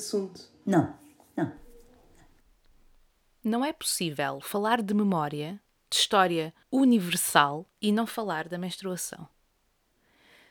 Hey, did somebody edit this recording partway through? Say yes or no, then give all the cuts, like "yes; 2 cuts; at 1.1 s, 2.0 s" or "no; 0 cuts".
yes; 2 cuts; at 6.6 s, 7.7 s